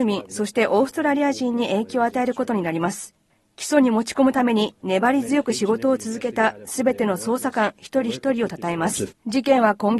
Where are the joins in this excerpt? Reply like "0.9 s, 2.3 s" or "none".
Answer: 9.1 s